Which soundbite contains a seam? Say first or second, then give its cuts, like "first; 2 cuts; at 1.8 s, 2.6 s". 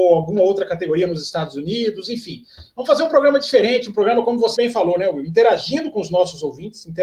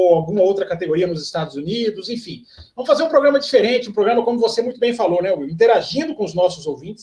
first; 1 cut; at 4.6 s